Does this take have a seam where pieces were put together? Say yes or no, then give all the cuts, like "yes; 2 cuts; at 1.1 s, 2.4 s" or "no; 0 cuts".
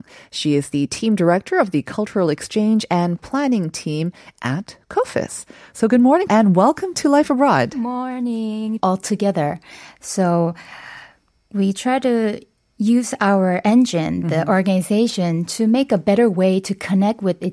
yes; 2 cuts; at 6.3 s, 8.8 s